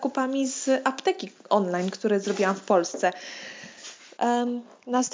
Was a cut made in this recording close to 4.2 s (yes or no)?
yes